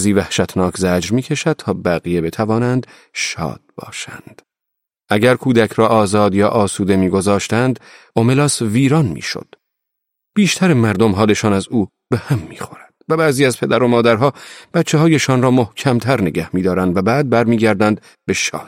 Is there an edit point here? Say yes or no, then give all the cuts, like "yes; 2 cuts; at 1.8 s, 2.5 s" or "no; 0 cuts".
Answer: no; 0 cuts